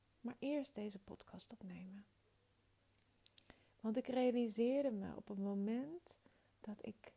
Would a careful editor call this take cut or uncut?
uncut